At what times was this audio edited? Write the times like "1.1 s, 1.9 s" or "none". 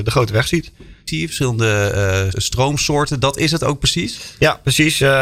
1.1 s, 2.3 s